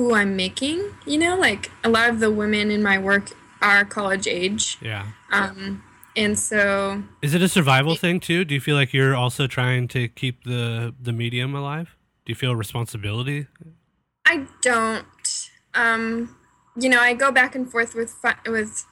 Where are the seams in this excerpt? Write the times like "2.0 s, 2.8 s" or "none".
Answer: none